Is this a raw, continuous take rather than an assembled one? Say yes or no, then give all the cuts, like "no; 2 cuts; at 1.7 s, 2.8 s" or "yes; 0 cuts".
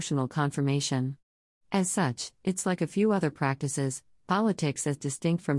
yes; 0 cuts